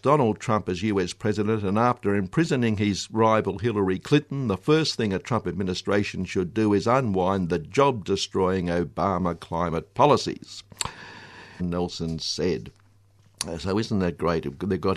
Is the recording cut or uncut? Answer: cut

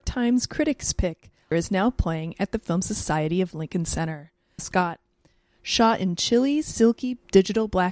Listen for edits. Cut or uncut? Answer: cut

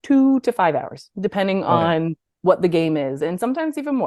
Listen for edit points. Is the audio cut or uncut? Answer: uncut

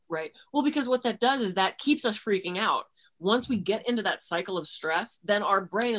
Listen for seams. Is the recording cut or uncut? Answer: uncut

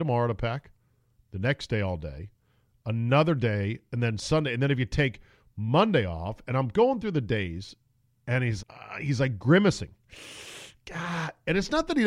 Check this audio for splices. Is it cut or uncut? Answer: cut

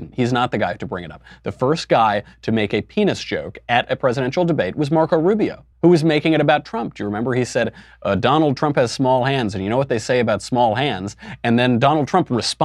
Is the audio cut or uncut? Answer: cut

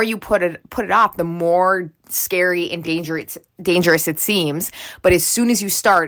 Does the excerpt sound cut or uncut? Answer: uncut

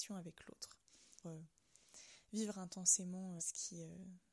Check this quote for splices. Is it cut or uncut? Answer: cut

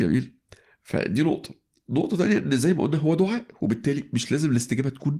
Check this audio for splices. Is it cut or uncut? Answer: uncut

